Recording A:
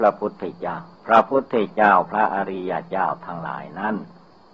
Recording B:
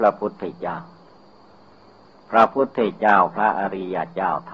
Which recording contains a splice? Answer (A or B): A